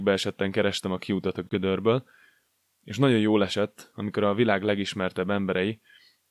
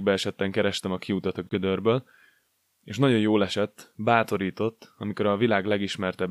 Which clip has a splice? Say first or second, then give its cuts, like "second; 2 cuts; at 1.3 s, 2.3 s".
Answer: first; 1 cut; at 3.9 s